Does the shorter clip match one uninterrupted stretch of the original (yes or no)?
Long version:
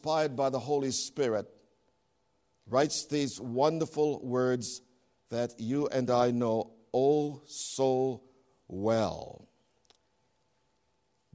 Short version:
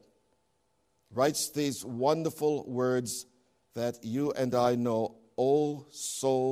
yes